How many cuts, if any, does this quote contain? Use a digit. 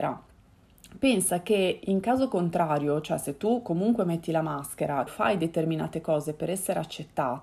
1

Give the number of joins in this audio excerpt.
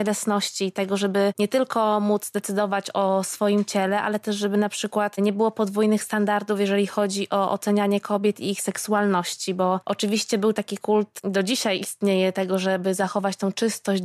0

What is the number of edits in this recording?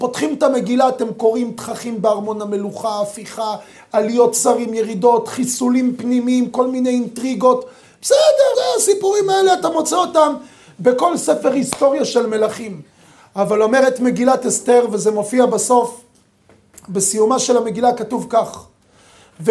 1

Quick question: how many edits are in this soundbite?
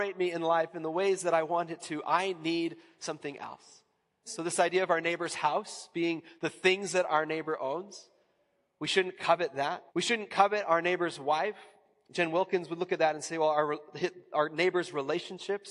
2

